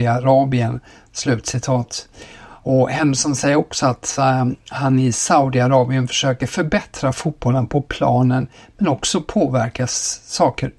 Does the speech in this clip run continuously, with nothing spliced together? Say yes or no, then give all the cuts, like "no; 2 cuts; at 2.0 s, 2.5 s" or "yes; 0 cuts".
yes; 0 cuts